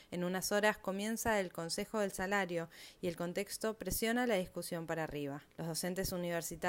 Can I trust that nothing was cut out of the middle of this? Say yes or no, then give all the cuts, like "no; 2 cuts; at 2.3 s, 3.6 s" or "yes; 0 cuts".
no; 1 cut; at 5.5 s